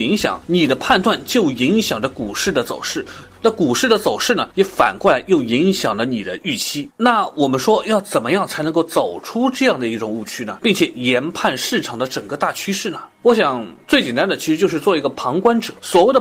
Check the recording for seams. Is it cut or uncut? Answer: uncut